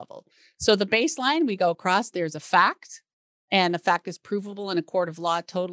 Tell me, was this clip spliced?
no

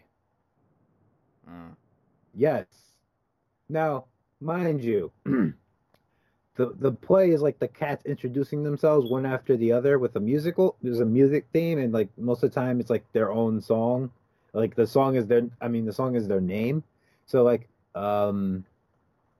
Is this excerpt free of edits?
no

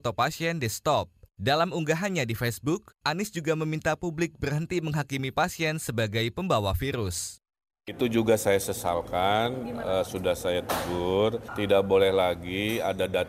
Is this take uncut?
no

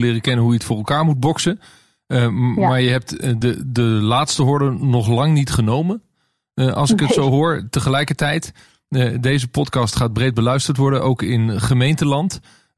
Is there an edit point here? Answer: no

